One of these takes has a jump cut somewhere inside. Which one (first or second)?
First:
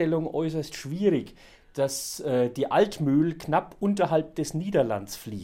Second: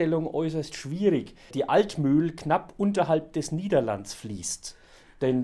second